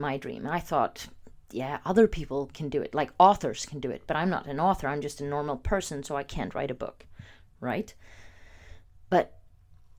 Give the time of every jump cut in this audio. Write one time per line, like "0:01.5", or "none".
none